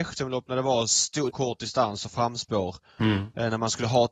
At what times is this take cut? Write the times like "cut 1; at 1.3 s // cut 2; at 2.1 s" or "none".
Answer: cut 1; at 1.3 s